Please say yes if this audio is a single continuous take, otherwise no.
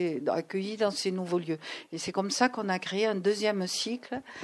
yes